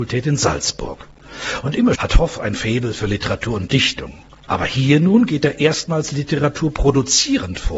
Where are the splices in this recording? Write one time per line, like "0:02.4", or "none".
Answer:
0:01.9